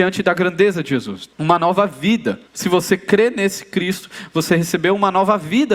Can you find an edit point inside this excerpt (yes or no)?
yes